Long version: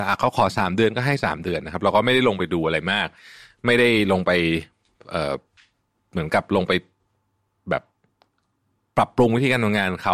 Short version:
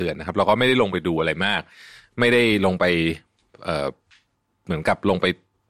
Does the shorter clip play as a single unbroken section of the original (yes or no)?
yes